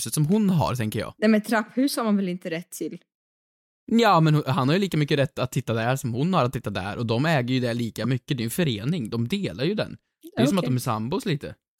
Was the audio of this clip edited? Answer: no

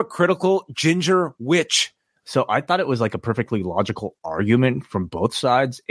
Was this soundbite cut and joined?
yes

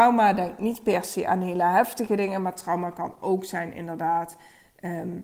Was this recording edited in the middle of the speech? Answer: no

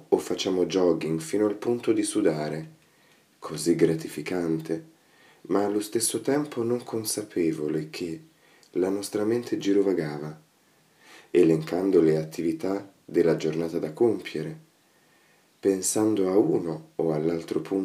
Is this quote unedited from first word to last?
yes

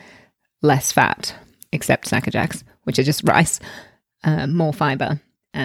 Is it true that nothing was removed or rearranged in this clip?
yes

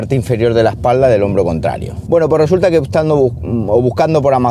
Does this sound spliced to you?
yes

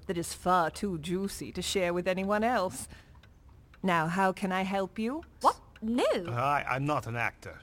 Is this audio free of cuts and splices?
no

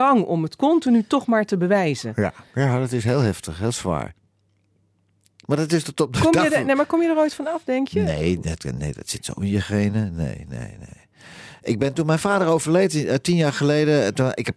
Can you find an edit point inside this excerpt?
yes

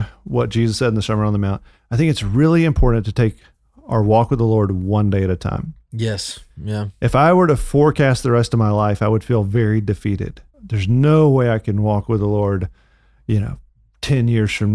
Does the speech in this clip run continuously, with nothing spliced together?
no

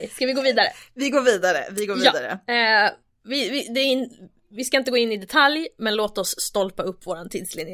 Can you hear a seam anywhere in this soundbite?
no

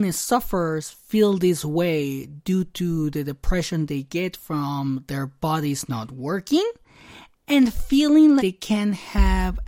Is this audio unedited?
no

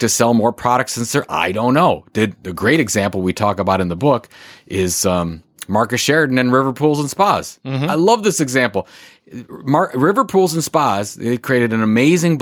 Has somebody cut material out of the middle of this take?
no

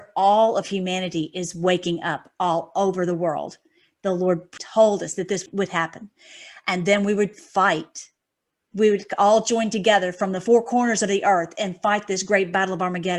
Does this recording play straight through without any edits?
yes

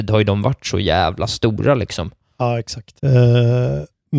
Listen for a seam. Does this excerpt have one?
yes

